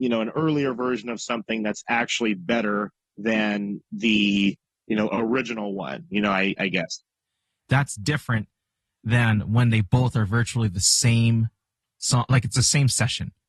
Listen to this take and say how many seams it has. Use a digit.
0